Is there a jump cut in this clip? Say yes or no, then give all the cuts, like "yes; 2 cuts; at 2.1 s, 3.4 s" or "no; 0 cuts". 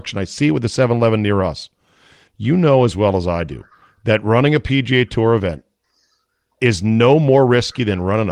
yes; 1 cut; at 2.3 s